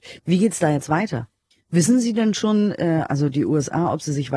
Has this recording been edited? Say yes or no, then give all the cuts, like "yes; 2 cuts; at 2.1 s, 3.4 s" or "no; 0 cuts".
yes; 1 cut; at 1.5 s